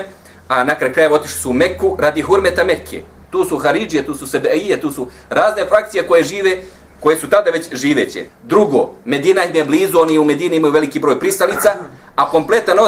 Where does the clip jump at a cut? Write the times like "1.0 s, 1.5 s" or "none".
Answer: 3.3 s, 8.3 s